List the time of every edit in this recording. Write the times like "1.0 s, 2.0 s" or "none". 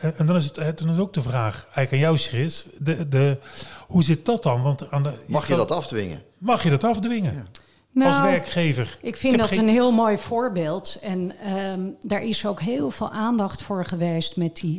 none